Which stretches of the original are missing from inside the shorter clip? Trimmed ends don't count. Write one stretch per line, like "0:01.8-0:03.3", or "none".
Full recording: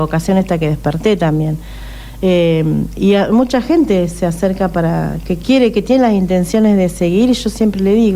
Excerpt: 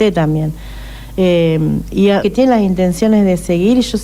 0:03.3-0:05.7